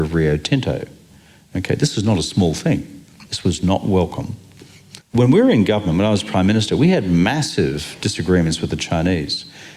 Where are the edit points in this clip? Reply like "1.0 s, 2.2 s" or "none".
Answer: 3.3 s, 5.0 s